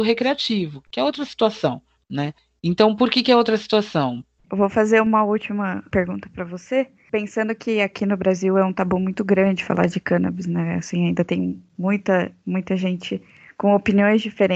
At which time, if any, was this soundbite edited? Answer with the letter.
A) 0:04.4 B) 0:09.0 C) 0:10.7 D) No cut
A